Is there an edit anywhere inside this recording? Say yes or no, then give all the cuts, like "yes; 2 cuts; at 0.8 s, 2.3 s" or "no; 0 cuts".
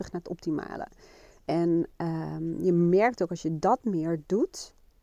no; 0 cuts